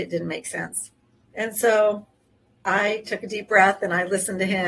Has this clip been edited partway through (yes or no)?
yes